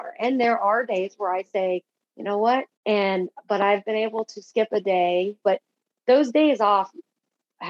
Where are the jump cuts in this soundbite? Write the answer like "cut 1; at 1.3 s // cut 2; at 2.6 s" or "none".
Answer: cut 1; at 2.8 s // cut 2; at 5.4 s